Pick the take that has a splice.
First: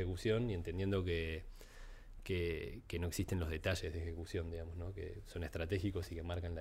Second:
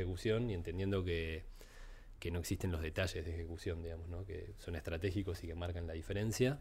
second; 1 cut; at 2.1 s

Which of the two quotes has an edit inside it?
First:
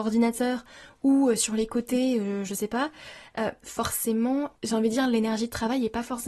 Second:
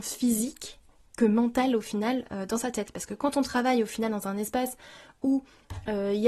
first; 1 cut; at 4.6 s

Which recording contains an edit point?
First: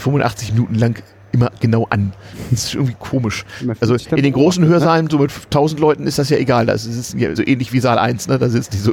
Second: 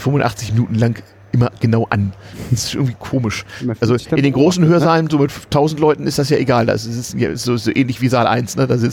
first; 1 cut; at 7.3 s

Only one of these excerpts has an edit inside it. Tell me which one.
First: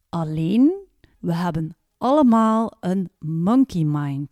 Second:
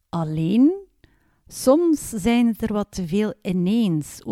first; 1 cut; at 1.1 s

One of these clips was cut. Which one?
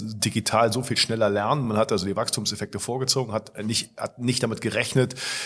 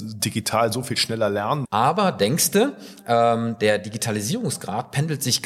second; 1 cut; at 1.6 s

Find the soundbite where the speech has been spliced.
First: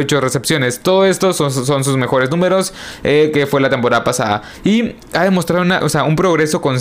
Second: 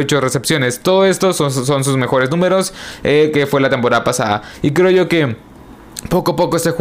first; 2 cuts; at 4.6 s, 5.8 s

